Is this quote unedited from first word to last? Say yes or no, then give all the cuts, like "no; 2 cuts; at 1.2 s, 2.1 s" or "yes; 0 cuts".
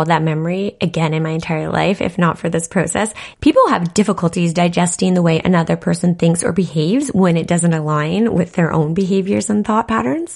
no; 1 cut; at 3.3 s